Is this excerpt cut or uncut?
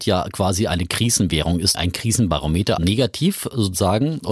cut